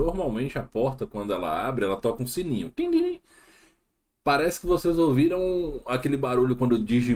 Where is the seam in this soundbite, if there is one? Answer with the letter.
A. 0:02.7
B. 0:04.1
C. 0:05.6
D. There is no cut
D